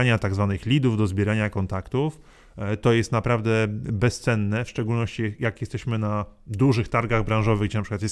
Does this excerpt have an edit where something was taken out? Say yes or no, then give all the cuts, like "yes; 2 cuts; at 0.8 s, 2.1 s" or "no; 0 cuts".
no; 0 cuts